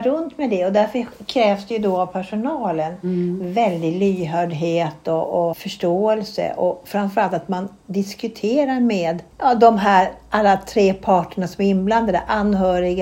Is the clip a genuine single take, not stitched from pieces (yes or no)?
no